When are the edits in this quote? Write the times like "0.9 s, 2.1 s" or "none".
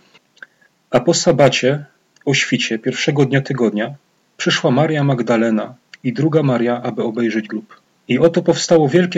none

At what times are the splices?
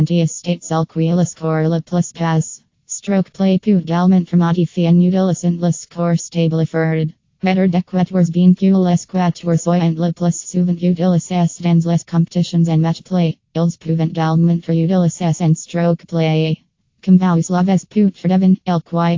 7.2 s

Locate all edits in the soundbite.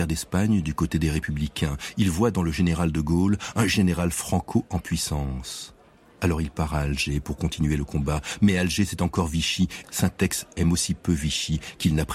9.8 s

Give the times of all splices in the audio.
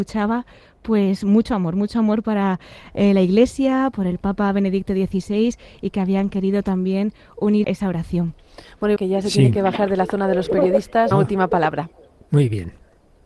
7.6 s, 9.0 s, 11.1 s

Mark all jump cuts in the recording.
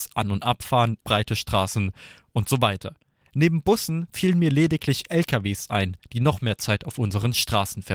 1.0 s

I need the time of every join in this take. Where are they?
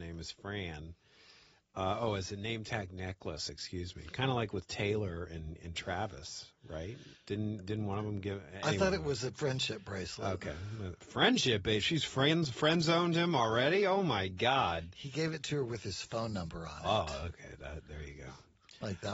none

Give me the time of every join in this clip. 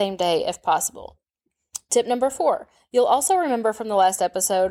none

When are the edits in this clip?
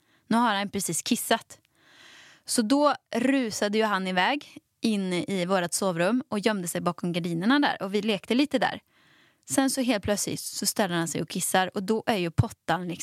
none

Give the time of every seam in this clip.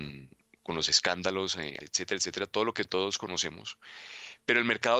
1.8 s

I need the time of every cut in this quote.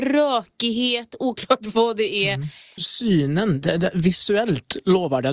2.8 s

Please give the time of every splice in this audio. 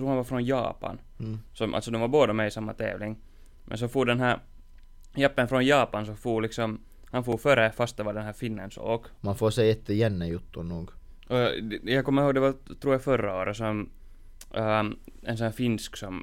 9.2 s

